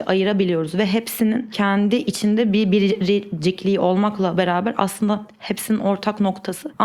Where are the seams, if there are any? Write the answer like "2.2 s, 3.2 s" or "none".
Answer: none